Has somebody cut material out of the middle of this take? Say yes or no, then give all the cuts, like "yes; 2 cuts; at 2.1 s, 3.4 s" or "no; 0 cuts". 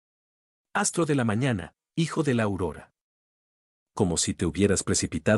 no; 0 cuts